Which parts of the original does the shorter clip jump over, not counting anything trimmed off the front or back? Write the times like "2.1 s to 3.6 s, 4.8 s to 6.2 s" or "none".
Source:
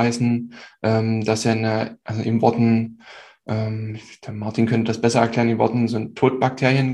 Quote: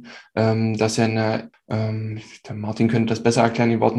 2.0 s to 3.3 s